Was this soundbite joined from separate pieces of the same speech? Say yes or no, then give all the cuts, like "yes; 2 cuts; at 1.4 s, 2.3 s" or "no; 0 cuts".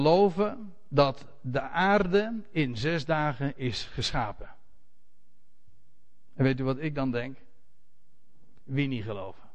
no; 0 cuts